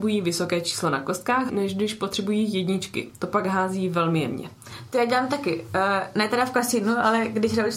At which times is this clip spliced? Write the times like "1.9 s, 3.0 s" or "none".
1.5 s